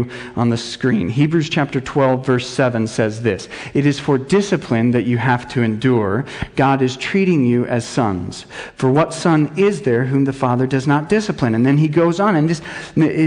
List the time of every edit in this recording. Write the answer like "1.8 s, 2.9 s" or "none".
none